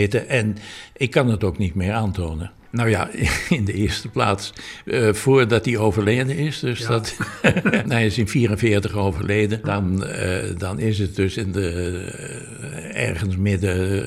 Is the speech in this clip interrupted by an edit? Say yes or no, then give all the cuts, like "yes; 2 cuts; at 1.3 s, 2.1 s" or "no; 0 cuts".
yes; 3 cuts; at 2.7 s, 7.9 s, 9.6 s